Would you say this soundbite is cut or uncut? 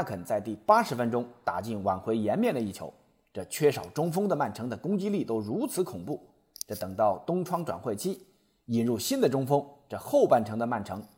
uncut